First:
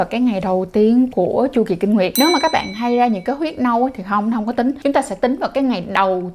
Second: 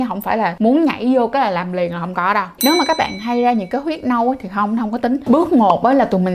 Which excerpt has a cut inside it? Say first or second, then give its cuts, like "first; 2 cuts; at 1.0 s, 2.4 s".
second; 2 cuts; at 2.6 s, 5.3 s